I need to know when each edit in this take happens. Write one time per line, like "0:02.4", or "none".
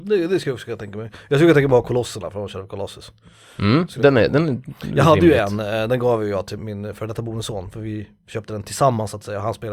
0:06.6